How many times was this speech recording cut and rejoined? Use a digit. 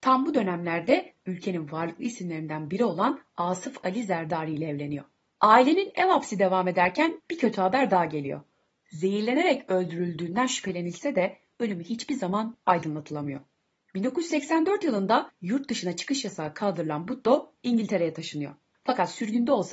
2